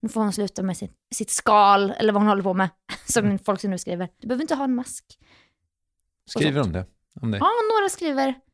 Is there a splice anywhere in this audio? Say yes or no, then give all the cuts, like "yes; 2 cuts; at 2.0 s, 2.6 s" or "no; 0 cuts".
yes; 1 cut; at 4.2 s